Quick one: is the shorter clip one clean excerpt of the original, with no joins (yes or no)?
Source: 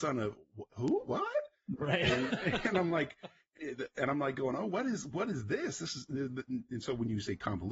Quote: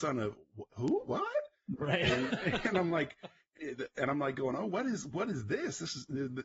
yes